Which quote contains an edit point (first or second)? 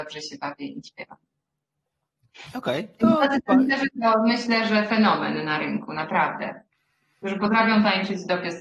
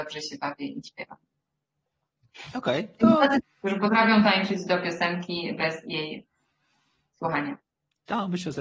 second